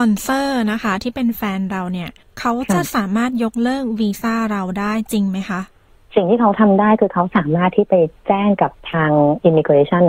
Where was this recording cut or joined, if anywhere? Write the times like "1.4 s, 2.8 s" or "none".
8.8 s